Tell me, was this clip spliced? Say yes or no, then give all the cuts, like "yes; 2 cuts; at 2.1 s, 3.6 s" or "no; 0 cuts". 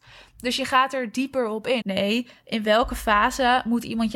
yes; 1 cut; at 1.8 s